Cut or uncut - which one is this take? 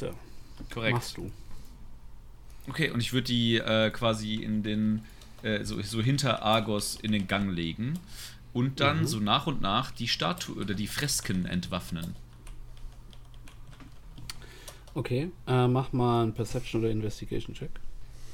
uncut